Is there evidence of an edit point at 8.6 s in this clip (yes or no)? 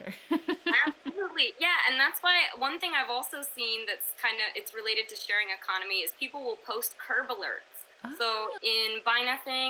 yes